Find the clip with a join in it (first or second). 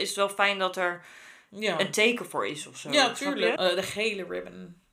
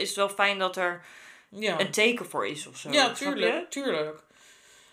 first